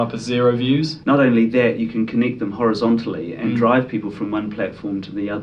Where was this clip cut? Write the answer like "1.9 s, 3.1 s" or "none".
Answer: 1.0 s